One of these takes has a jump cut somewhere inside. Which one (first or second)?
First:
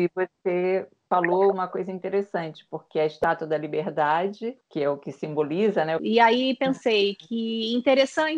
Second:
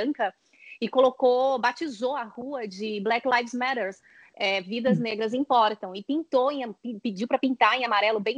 first